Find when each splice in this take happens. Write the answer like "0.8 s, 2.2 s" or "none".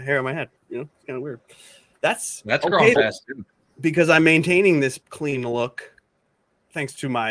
3.0 s, 5.0 s